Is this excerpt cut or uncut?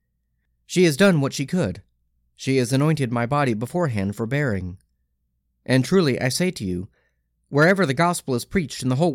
uncut